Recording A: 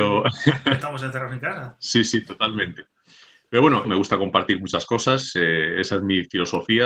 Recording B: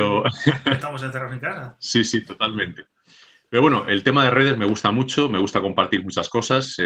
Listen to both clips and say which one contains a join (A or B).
A